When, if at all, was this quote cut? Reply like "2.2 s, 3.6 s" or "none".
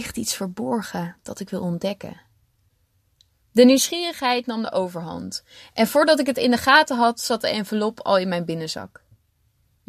none